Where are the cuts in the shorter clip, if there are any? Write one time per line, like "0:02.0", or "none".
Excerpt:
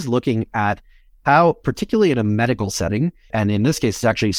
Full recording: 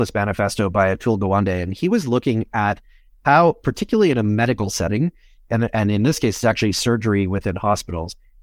0:03.3